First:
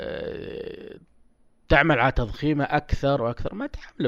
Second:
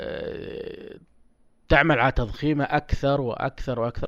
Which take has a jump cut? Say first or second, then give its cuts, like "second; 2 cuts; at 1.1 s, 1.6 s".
first; 1 cut; at 3.2 s